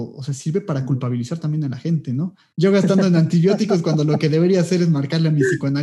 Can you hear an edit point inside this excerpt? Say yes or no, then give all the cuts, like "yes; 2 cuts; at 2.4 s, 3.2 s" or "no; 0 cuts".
yes; 1 cut; at 2.5 s